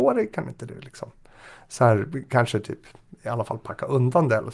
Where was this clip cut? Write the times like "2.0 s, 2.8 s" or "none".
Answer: none